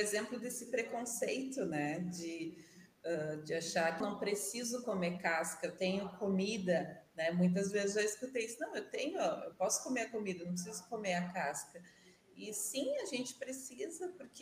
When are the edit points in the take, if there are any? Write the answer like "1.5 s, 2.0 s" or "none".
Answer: 4.0 s